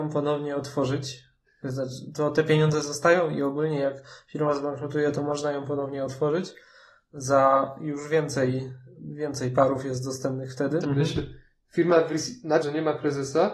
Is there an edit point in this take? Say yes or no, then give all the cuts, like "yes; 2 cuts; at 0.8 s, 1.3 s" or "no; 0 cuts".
yes; 2 cuts; at 10.8 s, 12.6 s